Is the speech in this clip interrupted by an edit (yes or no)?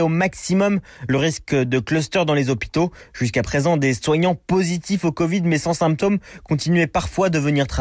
no